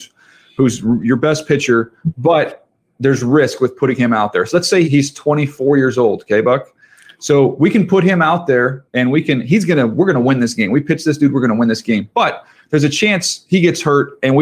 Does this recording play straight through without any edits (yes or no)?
no